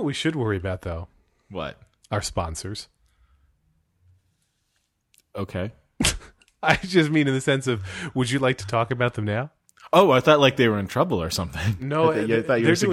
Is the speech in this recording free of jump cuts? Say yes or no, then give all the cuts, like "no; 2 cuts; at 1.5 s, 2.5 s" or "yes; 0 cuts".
yes; 0 cuts